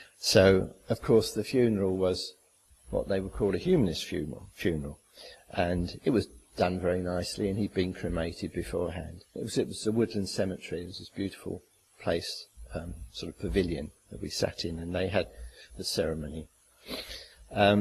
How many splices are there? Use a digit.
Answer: 1